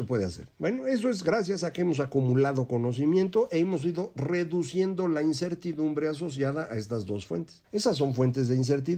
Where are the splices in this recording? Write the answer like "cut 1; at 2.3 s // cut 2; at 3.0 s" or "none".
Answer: cut 1; at 7.6 s